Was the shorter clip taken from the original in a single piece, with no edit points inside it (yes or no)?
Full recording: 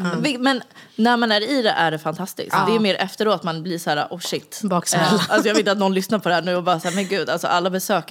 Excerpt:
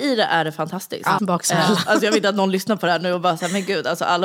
no